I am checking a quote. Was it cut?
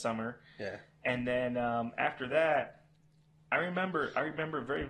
no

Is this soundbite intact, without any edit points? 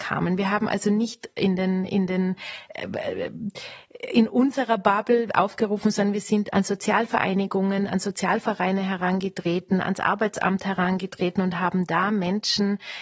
no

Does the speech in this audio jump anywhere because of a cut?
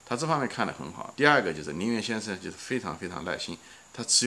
yes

